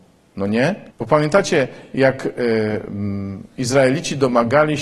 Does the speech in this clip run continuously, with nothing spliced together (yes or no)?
no